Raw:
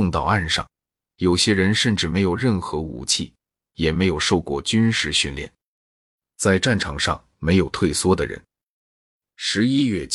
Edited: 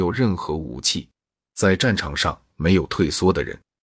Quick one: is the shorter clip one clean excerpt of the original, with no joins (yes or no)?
no